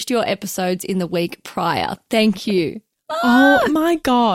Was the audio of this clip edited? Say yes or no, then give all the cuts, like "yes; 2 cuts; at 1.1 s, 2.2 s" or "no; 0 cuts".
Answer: no; 0 cuts